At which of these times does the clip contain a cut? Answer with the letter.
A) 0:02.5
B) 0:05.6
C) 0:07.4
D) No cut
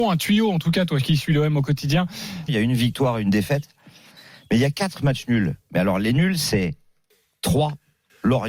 A